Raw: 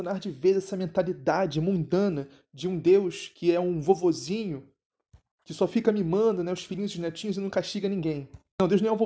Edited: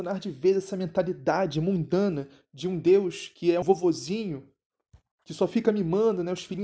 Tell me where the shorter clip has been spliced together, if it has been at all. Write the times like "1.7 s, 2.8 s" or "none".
3.6 s